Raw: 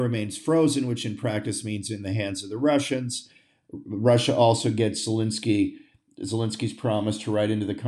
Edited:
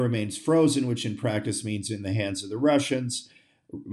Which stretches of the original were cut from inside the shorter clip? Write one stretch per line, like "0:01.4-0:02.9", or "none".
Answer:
none